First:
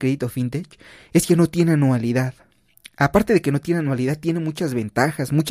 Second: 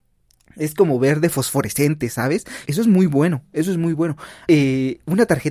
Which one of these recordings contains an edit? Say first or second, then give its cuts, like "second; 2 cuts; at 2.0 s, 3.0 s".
second; 2 cuts; at 2.6 s, 4.5 s